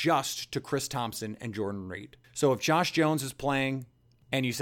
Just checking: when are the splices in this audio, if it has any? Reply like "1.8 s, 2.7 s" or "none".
2.2 s